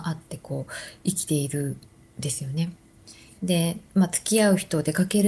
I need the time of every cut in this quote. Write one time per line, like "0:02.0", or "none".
0:03.3